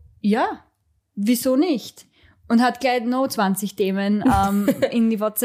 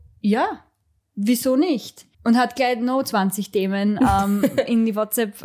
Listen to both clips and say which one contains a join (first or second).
second